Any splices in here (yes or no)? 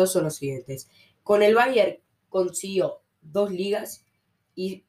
yes